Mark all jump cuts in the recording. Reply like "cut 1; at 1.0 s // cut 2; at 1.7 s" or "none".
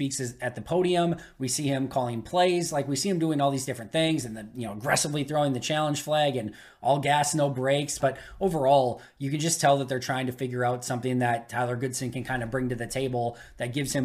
cut 1; at 8.0 s